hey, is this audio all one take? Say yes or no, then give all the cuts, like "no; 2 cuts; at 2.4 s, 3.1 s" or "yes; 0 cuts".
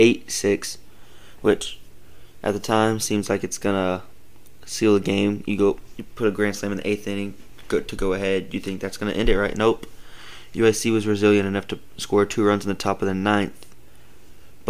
yes; 0 cuts